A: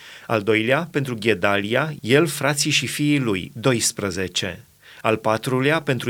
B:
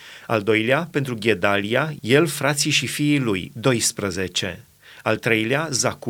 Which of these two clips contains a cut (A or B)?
A